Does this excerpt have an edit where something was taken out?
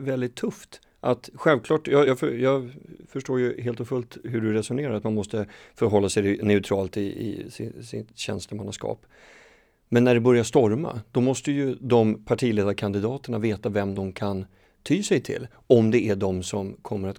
no; 0 cuts

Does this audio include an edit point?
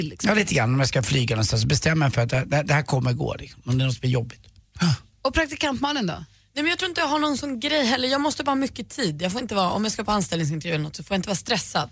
no; 0 cuts

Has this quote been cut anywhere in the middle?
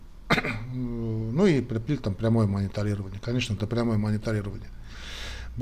yes; 1 cut; at 3.6 s

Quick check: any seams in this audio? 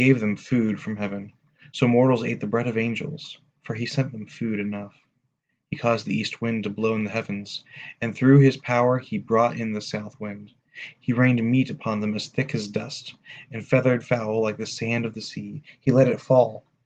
no; 0 cuts

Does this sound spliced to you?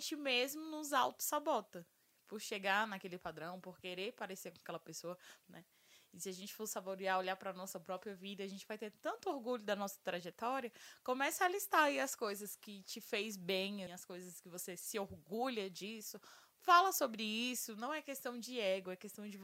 yes; 2 cuts; at 5.4 s, 13.9 s

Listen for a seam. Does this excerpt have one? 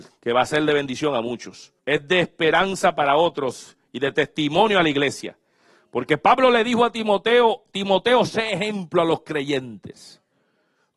yes; 1 cut; at 1.8 s

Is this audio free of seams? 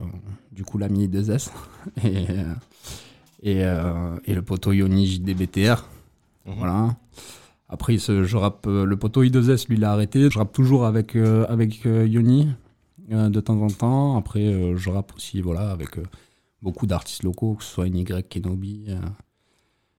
no; 1 cut; at 10.3 s

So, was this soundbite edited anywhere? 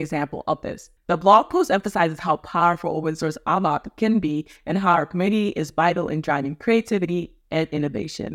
yes; 1 cut; at 1.0 s

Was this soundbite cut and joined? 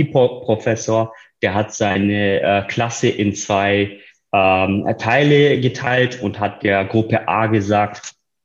no; 0 cuts

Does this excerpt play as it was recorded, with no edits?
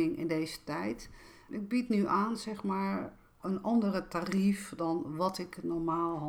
no; 1 cut; at 1.5 s

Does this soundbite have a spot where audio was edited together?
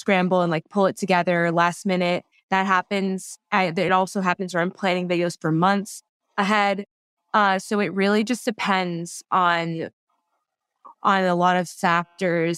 no; 0 cuts

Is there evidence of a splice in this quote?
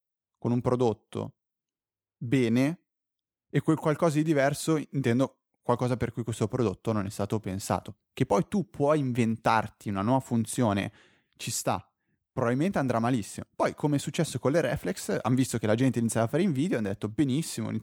no; 0 cuts

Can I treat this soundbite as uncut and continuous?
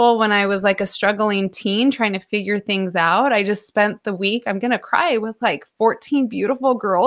yes; 0 cuts

